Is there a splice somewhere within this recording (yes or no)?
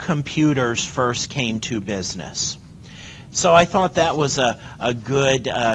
yes